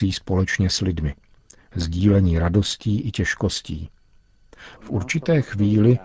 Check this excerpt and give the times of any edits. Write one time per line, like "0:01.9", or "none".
0:04.8